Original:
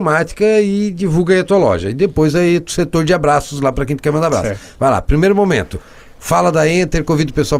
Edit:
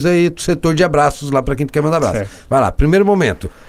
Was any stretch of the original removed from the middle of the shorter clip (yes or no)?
no